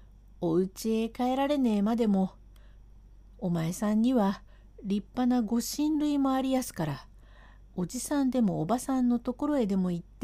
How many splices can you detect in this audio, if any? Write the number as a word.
zero